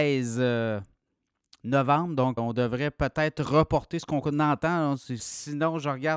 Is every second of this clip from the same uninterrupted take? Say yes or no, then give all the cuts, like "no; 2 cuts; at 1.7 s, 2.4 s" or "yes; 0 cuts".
no; 2 cuts; at 2.4 s, 5.2 s